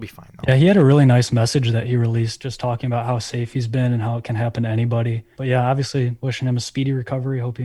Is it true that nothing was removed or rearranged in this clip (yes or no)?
no